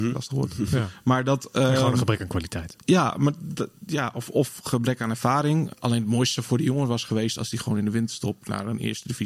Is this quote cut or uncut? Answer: cut